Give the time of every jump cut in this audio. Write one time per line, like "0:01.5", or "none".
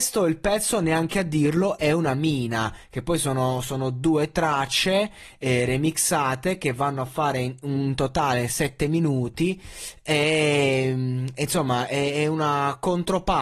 none